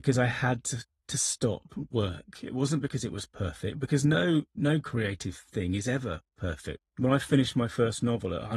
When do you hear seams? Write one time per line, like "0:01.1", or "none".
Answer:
0:06.8

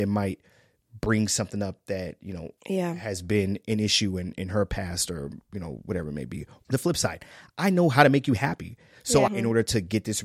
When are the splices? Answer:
0:02.6
0:06.6
0:09.3

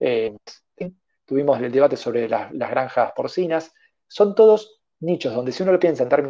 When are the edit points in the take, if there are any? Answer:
none

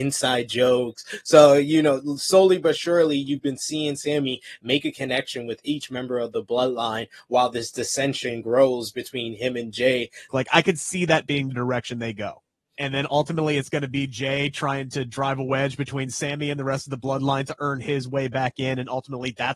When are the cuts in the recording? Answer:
0:10.3
0:12.8

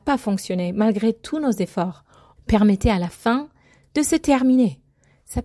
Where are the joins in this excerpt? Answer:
0:02.4

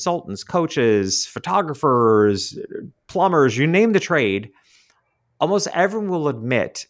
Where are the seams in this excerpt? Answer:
none

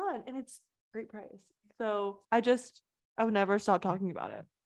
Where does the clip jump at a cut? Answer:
0:02.2

